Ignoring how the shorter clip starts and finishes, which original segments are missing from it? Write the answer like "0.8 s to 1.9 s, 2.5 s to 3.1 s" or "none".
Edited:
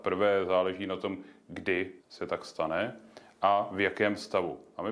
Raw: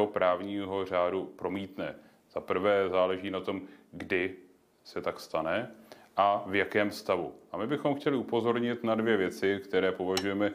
4.4 s to 4.7 s

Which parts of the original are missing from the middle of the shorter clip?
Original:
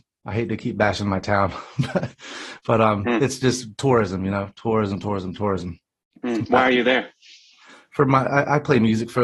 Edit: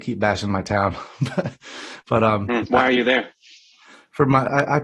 3.2 s to 6.4 s

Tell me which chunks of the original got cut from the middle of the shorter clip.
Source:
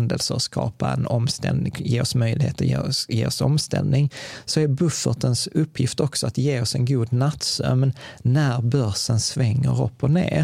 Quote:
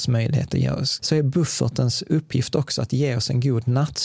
3.1 s to 4.4 s

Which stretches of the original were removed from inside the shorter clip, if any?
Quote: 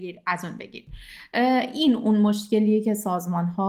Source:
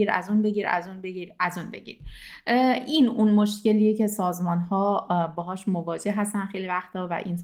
none

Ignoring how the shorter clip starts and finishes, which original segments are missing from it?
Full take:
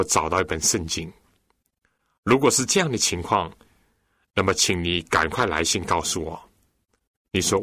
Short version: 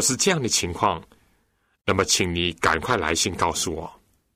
none

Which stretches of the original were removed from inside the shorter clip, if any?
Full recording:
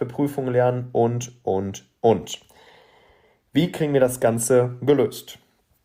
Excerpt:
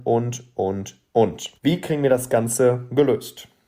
2.5 s to 3.5 s

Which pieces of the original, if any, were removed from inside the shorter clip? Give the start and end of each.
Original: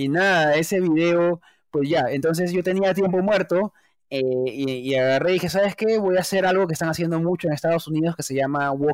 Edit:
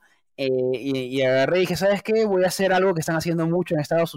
none

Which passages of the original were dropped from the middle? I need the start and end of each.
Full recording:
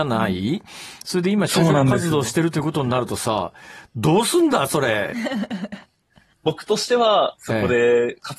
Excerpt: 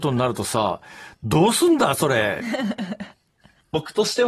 none

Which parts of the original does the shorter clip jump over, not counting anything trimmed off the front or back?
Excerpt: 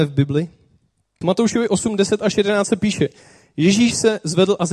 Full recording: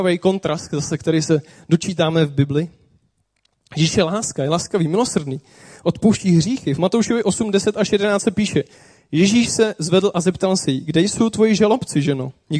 3.4 s to 6.8 s

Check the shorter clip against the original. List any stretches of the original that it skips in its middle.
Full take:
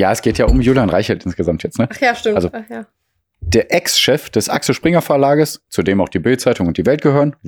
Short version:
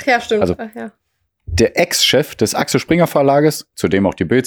none

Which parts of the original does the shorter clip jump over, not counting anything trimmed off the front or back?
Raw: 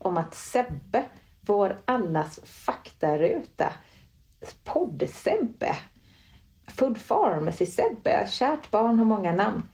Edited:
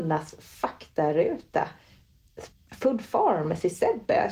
4.6 s to 6.5 s

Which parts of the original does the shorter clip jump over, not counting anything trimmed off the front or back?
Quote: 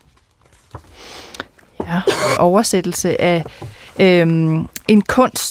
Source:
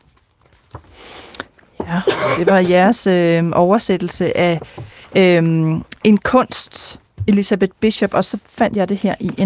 2.4 s to 3.5 s

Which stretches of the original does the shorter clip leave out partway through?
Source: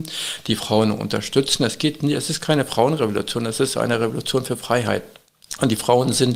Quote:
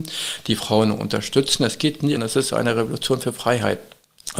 2.2 s to 3.4 s

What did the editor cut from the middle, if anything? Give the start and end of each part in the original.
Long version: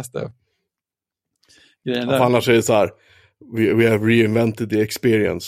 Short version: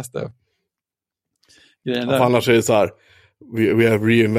none

